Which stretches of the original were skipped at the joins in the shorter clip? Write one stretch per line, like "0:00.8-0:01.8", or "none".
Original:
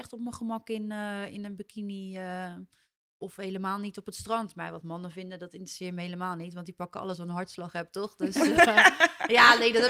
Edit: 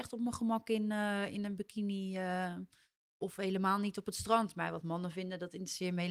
none